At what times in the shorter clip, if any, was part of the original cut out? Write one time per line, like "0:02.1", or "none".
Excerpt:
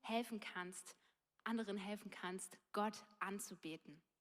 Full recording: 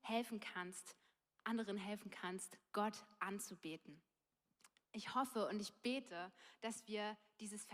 none

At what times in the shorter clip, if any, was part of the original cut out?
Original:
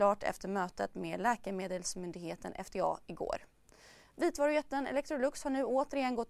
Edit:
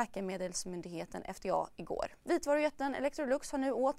0:02.2

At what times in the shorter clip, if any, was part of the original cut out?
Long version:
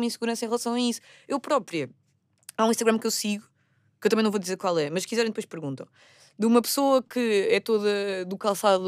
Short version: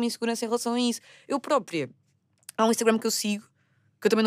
none

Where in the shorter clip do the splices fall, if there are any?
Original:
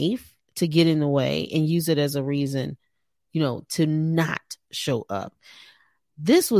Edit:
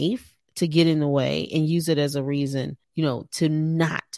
0:02.8

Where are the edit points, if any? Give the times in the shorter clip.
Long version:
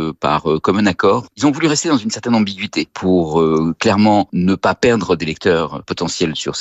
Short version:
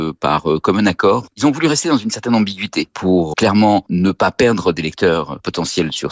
0:03.3

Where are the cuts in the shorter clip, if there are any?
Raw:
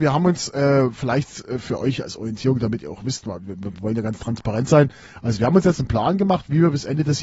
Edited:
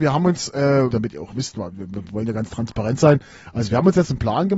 0:00.9

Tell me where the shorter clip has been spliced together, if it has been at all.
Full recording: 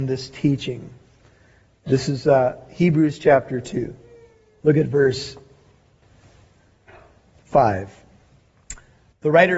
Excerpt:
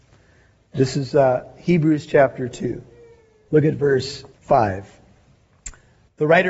0:04.3

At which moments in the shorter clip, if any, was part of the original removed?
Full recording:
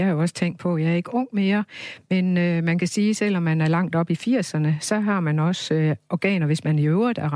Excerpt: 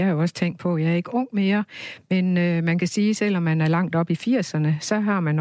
none

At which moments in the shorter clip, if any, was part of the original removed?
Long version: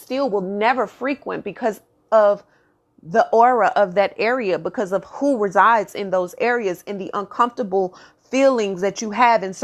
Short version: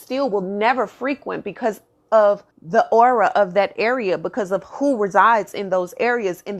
0:02.5

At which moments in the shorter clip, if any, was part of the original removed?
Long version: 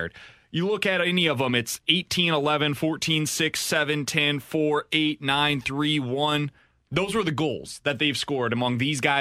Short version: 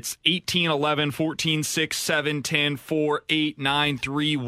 none

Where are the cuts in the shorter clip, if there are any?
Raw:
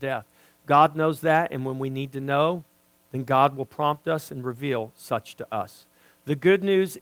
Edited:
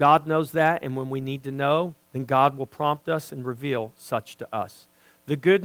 0:02.0

